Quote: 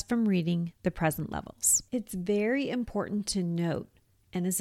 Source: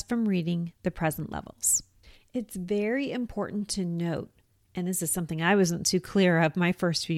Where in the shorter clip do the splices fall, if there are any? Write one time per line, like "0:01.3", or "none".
0:01.9